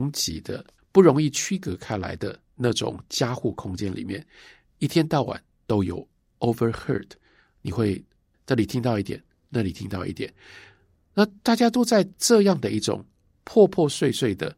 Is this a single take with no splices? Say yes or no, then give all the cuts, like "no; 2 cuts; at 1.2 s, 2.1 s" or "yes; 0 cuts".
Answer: yes; 0 cuts